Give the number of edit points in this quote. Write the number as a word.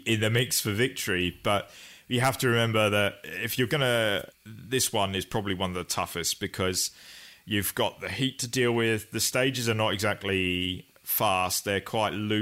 one